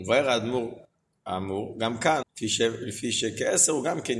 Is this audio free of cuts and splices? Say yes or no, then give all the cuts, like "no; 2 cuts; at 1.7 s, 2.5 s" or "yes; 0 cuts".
no; 1 cut; at 2.2 s